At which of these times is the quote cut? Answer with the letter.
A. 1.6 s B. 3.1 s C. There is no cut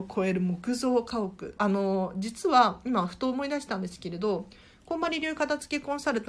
A